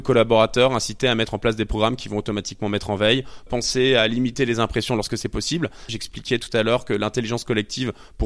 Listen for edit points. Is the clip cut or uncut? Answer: cut